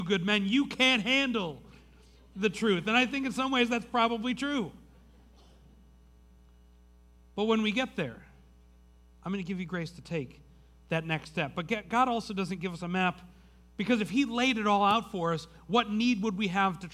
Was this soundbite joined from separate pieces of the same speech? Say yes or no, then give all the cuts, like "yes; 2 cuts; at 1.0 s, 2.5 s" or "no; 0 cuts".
no; 0 cuts